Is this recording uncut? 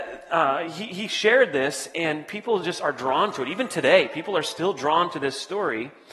yes; 0 cuts

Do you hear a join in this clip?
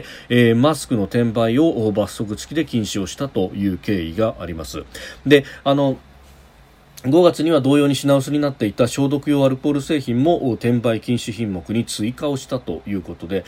no; 0 cuts

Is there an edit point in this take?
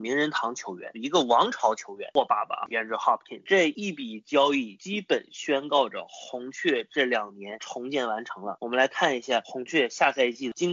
no; 0 cuts

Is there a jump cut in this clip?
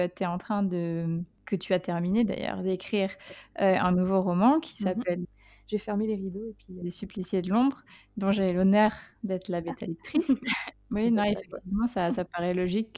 yes; 3 cuts; at 5.2 s, 6.8 s, 10.7 s

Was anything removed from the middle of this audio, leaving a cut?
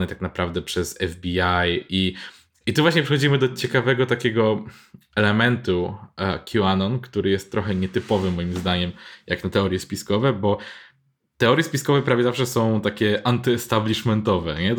no; 0 cuts

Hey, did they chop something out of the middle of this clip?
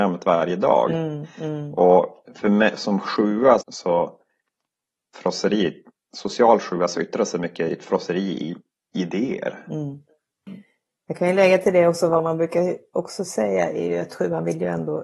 yes; 1 cut; at 3.6 s

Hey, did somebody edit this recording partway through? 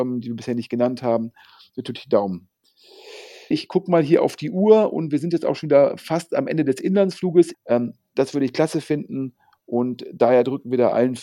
yes; 2 cuts; at 3.5 s, 7.5 s

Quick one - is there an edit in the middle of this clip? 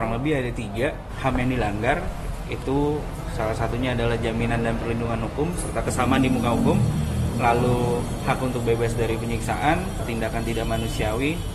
no; 0 cuts

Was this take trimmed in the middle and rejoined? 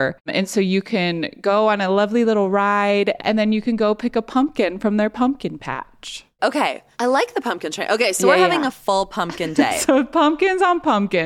yes; 1 cut; at 3.2 s

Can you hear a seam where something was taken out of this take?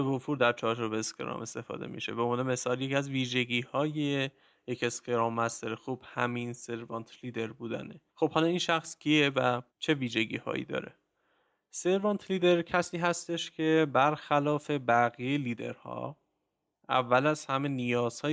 yes; 2 cuts; at 8.1 s, 9.7 s

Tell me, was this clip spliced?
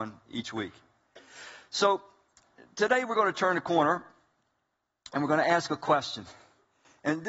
no; 0 cuts

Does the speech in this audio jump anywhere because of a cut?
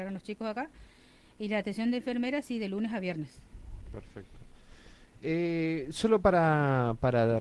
no; 0 cuts

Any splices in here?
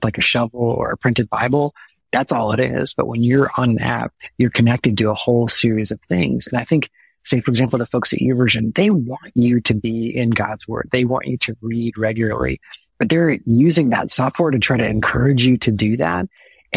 no; 0 cuts

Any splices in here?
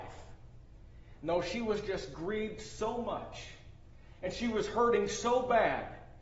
no; 0 cuts

